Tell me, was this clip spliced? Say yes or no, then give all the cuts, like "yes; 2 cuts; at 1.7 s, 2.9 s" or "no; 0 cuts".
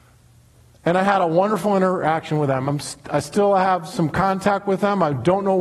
no; 0 cuts